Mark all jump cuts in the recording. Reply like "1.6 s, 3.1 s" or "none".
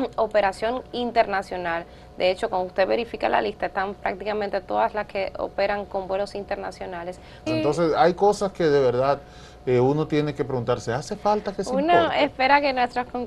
7.5 s